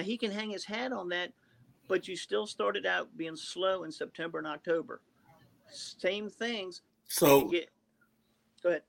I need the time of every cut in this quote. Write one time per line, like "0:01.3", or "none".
0:06.9